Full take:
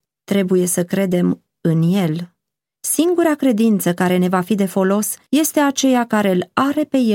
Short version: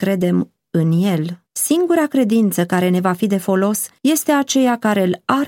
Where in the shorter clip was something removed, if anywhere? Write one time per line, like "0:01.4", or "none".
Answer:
0:01.5